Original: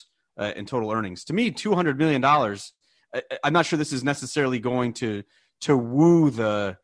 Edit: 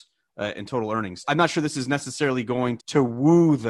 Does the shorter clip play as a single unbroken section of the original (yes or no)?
no